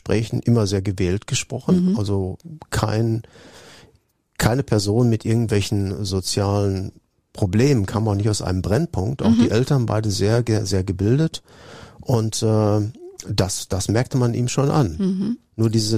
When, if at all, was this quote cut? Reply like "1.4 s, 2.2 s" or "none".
none

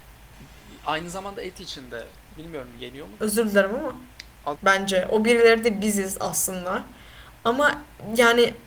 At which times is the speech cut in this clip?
3.2 s, 4.6 s

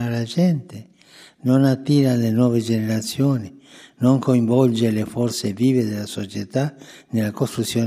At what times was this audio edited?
none

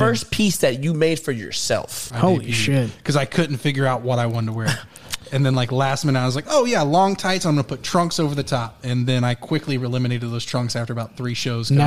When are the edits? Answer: 2.1 s

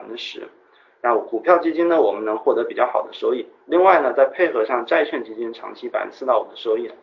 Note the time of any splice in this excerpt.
none

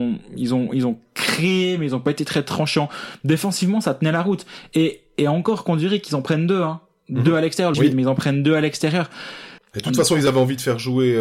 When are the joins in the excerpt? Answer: 7.7 s, 9.6 s

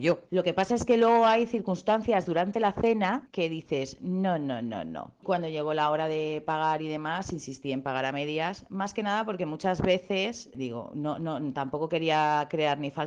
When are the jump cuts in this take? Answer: 5.2 s

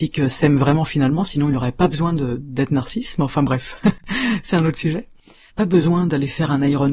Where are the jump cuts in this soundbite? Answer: 2.4 s, 5.5 s

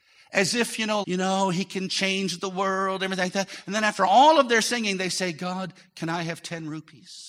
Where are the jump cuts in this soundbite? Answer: 1.0 s

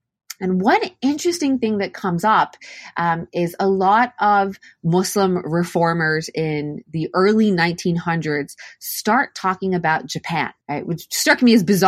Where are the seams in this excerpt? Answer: 10.6 s

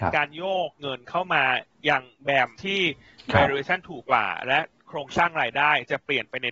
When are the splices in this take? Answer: 2.5 s, 4.0 s

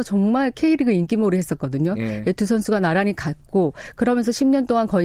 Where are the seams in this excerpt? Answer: none

